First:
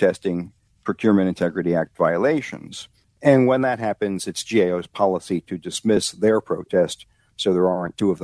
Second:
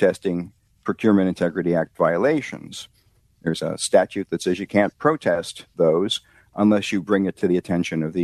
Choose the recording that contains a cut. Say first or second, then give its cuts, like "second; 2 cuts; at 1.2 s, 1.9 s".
first; 1 cut; at 3.0 s